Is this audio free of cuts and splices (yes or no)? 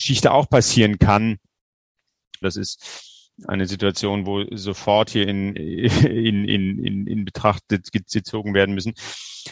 no